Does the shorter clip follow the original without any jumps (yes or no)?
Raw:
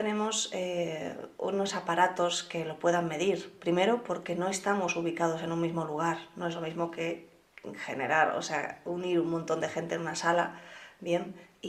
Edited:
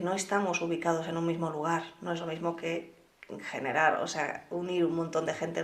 yes